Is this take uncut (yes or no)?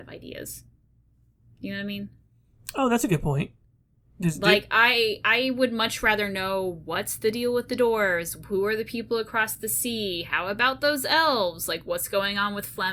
yes